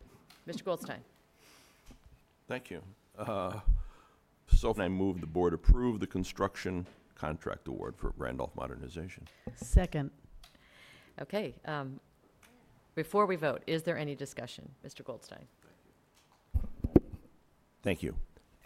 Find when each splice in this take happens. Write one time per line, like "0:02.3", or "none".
0:04.8
0:14.8